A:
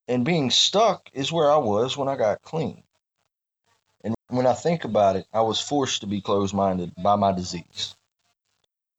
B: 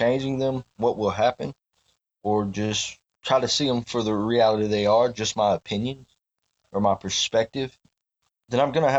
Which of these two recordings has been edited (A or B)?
A